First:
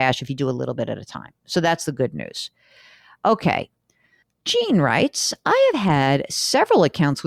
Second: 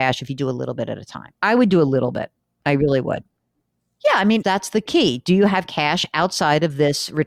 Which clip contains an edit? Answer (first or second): second